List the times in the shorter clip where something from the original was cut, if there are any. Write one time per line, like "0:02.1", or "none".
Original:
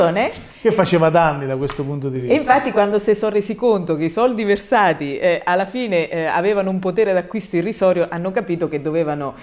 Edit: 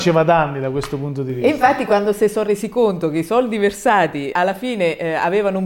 0:04.3